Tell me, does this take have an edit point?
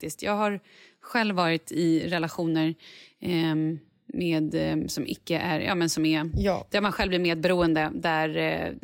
no; 0 cuts

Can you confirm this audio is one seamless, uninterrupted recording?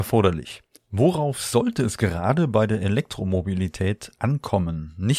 yes; 0 cuts

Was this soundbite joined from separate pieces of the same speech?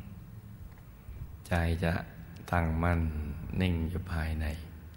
no; 0 cuts

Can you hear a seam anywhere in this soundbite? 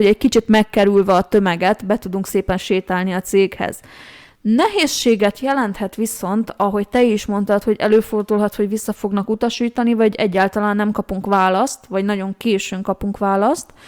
no; 0 cuts

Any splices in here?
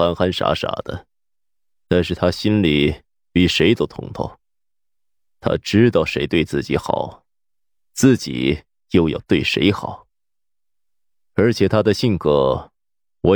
no; 0 cuts

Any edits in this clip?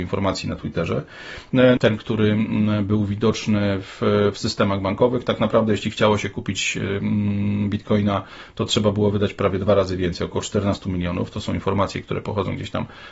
yes; 1 cut; at 1.8 s

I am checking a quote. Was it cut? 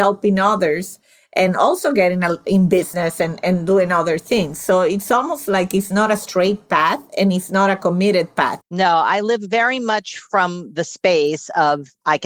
yes; 1 cut; at 8.6 s

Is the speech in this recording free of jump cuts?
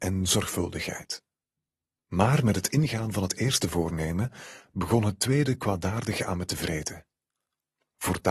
yes; 0 cuts

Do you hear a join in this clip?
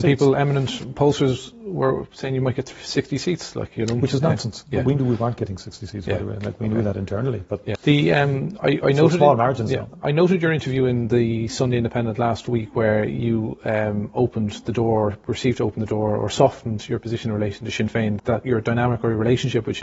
yes; 2 cuts; at 7.7 s, 18.2 s

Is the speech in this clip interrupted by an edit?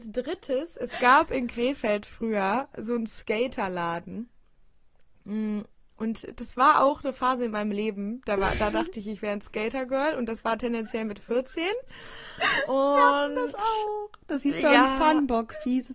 no; 0 cuts

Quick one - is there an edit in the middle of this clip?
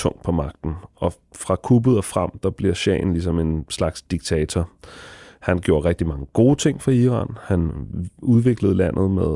no; 0 cuts

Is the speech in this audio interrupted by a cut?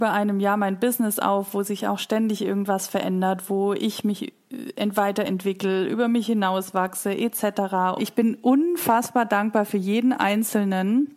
yes; 1 cut; at 8.0 s

